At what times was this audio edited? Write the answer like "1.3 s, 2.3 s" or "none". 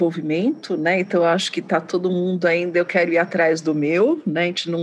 none